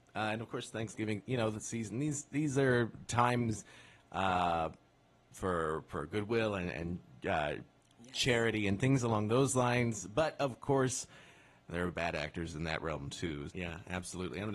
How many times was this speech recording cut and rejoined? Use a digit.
1